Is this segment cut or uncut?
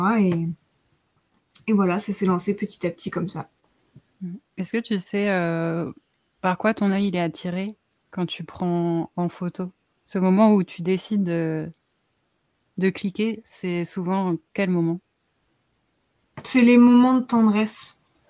uncut